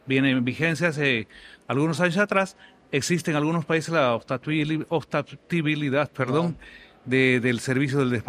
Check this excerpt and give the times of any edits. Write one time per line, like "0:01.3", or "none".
none